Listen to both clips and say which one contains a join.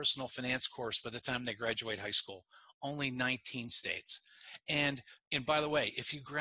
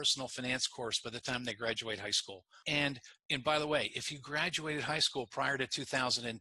second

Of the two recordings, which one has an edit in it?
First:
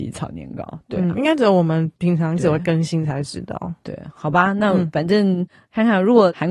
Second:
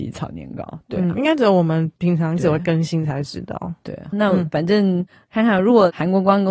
second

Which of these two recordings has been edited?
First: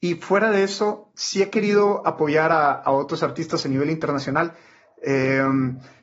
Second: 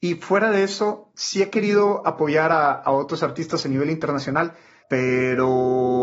second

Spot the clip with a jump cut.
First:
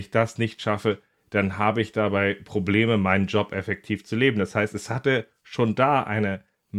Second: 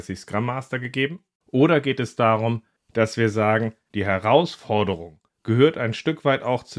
second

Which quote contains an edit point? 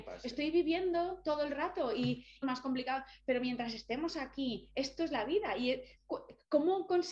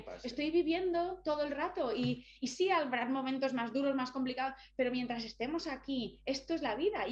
first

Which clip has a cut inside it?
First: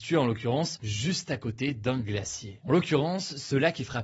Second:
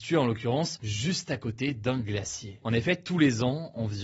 second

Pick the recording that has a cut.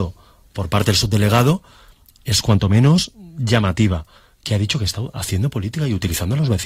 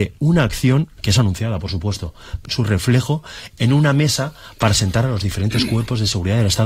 second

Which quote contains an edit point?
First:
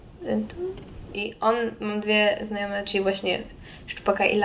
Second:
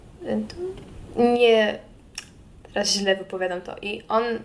first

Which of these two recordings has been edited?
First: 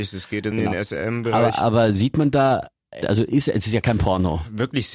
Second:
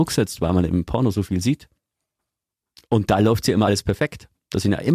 first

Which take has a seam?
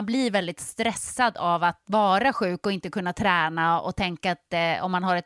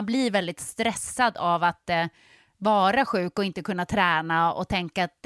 first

